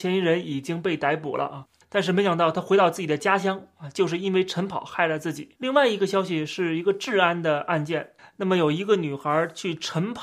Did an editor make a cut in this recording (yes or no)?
yes